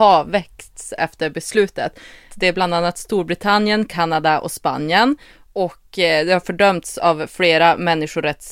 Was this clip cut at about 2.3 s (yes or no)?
yes